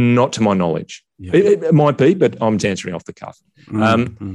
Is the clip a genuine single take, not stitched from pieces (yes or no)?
no